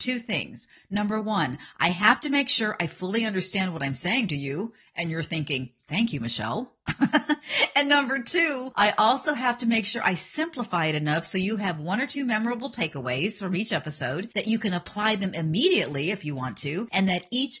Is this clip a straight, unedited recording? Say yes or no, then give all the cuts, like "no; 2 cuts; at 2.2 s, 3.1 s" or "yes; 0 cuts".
yes; 0 cuts